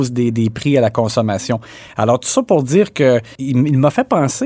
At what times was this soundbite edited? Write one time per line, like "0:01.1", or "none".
none